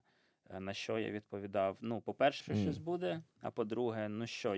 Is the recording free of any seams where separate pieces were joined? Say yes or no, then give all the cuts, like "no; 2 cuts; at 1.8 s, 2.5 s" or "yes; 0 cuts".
no; 1 cut; at 2.4 s